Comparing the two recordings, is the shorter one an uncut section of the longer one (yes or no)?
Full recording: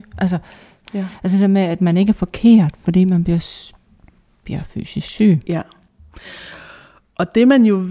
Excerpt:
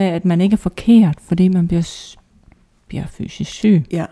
yes